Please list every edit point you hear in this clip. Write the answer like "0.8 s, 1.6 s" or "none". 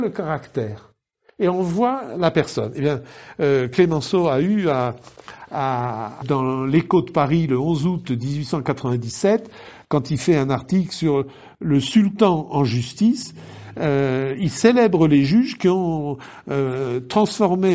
6.2 s